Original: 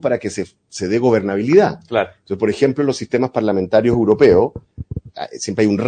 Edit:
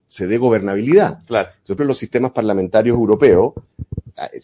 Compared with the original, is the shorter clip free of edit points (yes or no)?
no